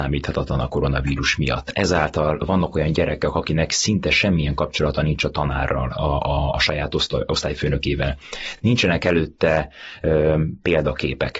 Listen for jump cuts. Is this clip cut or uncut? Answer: uncut